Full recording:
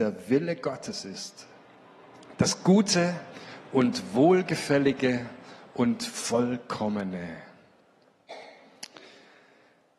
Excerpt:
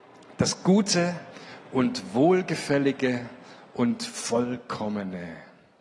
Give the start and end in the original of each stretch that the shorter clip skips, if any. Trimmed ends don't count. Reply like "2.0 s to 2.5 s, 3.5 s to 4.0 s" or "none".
none